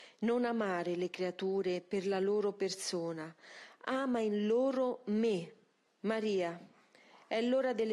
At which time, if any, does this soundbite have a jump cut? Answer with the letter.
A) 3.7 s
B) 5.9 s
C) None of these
B